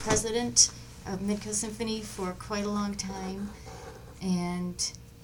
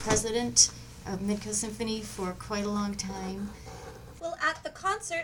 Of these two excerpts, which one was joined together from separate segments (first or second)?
second